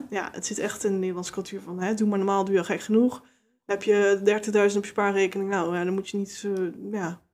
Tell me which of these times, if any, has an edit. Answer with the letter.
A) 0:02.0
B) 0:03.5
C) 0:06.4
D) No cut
D